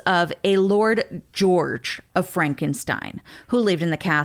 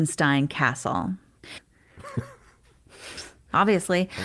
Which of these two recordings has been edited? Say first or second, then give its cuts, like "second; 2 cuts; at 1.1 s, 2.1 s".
second; 1 cut; at 1.6 s